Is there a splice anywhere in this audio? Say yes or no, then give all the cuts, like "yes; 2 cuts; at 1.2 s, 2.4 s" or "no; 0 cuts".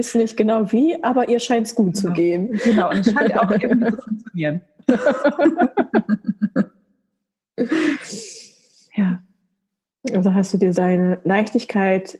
yes; 1 cut; at 10.7 s